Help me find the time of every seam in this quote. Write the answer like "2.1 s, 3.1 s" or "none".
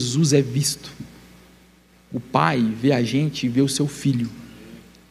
none